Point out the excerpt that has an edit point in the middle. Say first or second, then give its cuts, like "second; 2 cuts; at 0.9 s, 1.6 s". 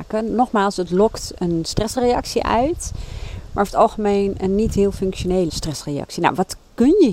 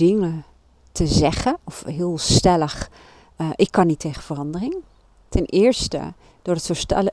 first; 1 cut; at 5.5 s